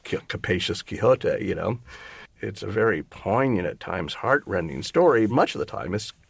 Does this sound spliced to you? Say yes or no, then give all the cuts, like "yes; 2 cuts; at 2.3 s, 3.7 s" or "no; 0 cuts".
yes; 2 cuts; at 2.3 s, 5.3 s